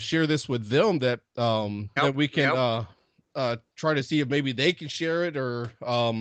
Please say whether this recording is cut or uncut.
cut